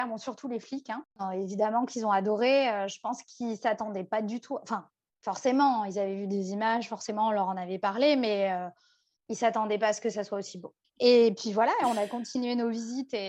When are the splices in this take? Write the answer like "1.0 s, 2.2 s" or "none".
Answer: 1.1 s, 10.8 s

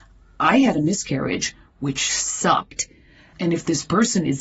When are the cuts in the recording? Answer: 3.3 s

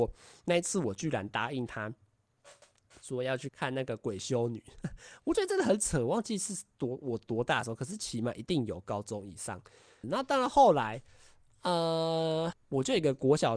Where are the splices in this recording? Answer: 3.5 s, 10.0 s, 12.5 s

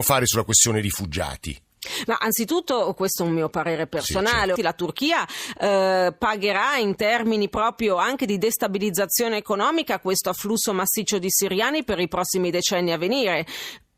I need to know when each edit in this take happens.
4.6 s

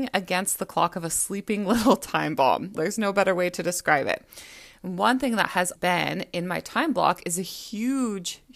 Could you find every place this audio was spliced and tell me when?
2.7 s, 5.8 s

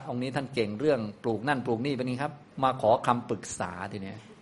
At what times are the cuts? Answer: 2.5 s

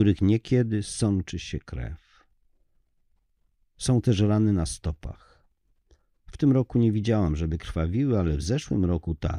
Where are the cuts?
none

